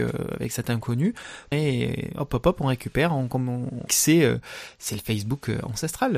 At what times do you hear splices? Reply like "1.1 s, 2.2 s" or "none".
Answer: 1.5 s, 3.9 s